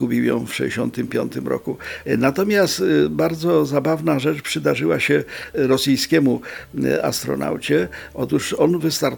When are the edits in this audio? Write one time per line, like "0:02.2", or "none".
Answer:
0:08.1